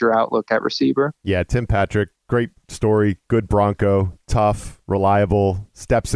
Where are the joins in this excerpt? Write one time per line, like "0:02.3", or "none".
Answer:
none